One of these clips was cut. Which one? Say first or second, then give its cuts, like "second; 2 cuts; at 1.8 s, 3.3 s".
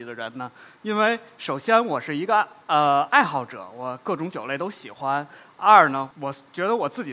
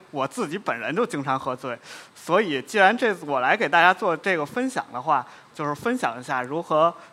second; 1 cut; at 5.5 s